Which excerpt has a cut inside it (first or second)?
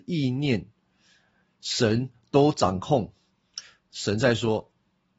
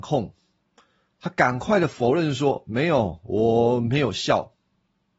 first